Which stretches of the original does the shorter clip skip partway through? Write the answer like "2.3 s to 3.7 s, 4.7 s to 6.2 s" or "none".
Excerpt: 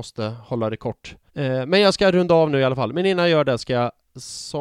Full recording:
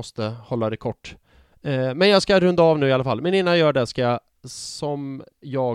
1.3 s to 1.6 s